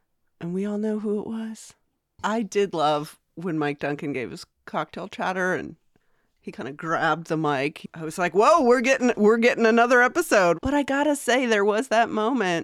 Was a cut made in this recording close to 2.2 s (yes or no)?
yes